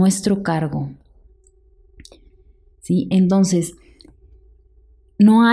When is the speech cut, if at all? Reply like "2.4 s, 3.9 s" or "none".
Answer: 2.7 s